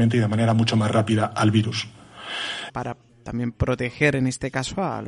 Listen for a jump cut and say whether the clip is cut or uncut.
cut